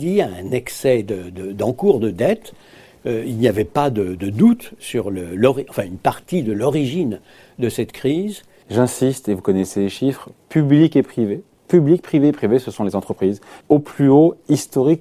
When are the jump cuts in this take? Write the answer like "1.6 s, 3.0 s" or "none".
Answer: 8.6 s, 13.6 s